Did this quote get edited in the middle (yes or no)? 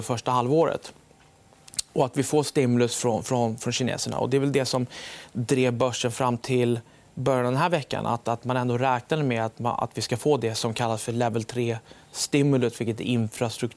no